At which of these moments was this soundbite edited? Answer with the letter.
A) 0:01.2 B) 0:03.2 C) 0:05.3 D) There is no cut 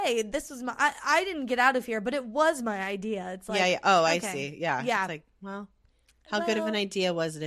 D